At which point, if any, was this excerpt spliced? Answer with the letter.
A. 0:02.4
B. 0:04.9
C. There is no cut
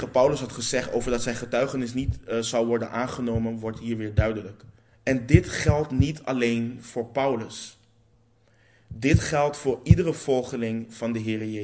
B